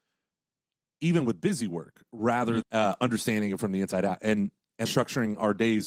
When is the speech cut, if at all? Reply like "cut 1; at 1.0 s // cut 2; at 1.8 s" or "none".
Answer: cut 1; at 2.6 s // cut 2; at 4.9 s